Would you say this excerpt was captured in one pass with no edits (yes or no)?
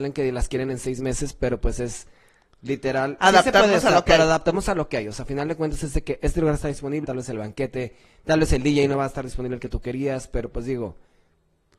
no